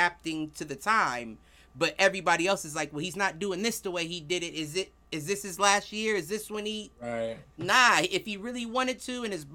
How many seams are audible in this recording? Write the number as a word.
zero